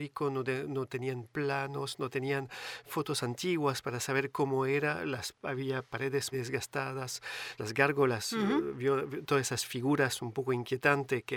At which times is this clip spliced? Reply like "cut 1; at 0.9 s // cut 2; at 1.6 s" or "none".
cut 1; at 6.3 s // cut 2; at 7.6 s